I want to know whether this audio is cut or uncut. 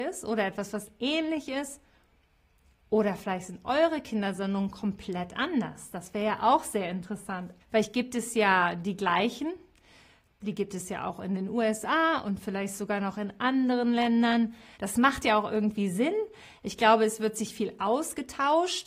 cut